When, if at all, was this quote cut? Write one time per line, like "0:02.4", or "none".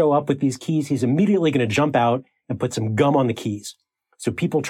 none